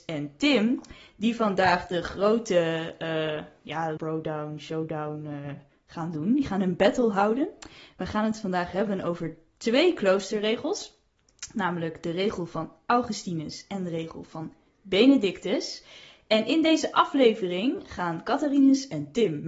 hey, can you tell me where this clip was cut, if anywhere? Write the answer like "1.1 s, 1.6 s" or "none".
4.0 s